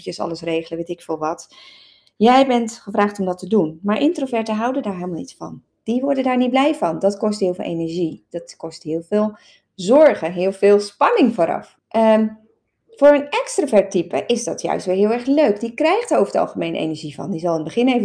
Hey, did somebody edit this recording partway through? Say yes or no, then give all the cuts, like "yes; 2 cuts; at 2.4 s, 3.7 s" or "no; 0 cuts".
yes; 1 cut; at 11.8 s